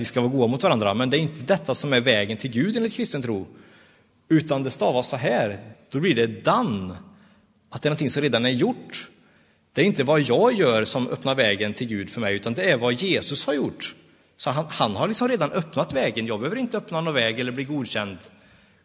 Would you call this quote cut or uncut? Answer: cut